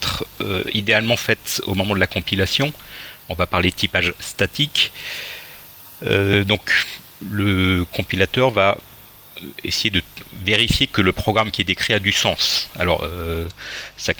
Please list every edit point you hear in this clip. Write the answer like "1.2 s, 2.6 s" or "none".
none